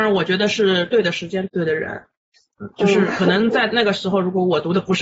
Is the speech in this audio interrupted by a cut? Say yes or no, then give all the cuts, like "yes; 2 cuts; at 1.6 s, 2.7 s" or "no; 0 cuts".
yes; 1 cut; at 1.5 s